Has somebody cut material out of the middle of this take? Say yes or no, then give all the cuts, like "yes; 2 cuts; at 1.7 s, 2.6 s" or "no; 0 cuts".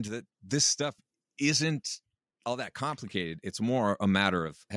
no; 0 cuts